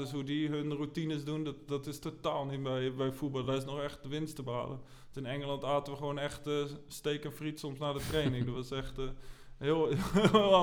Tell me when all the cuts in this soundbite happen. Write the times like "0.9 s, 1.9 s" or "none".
none